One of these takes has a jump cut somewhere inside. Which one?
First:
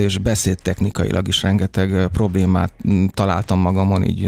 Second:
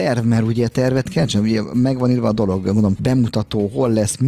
second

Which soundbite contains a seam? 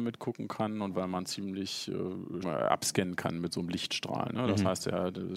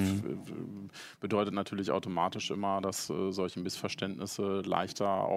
first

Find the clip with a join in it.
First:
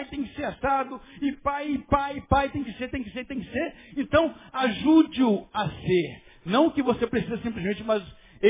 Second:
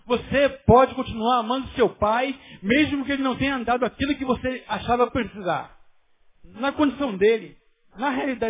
second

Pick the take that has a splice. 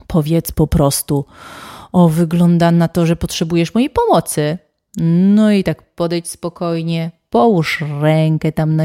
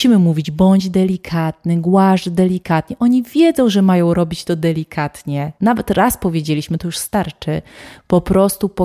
second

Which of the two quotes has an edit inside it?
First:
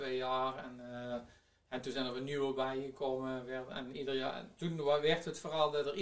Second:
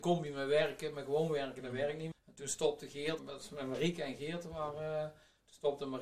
second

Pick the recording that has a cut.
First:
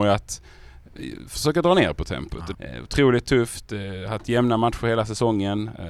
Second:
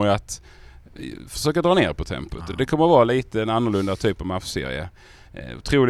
first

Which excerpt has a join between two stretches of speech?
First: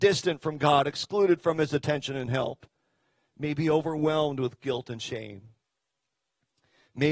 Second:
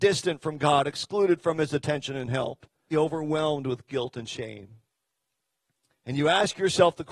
second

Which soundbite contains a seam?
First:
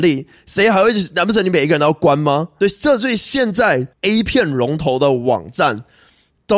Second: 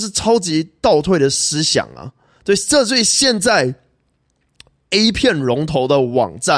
first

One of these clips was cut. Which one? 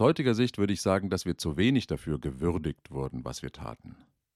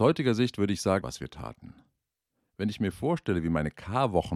second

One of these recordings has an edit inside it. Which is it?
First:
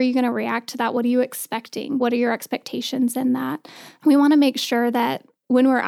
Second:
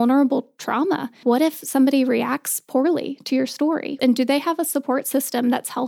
second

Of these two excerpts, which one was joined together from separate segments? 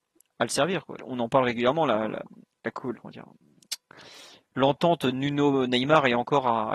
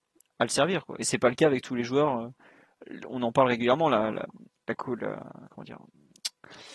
first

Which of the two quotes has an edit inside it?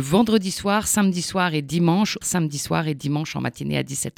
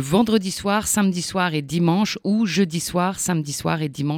first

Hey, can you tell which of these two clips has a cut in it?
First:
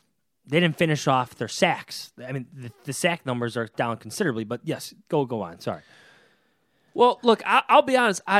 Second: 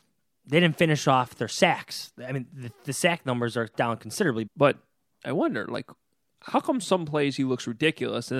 second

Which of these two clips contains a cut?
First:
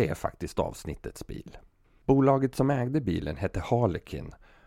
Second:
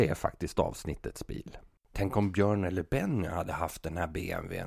second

